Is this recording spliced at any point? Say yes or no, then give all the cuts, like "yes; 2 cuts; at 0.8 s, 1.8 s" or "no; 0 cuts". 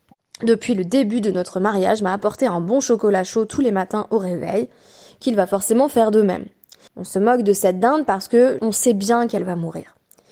yes; 2 cuts; at 6.9 s, 8.6 s